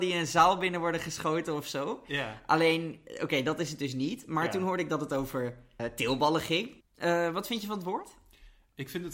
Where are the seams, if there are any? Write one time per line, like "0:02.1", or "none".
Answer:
0:05.8
0:06.8